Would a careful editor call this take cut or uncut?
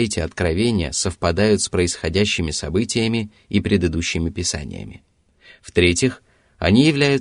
uncut